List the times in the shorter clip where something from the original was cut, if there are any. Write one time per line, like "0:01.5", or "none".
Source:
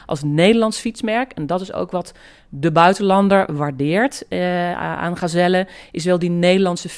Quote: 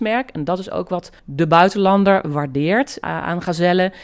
0:01.2
0:03.0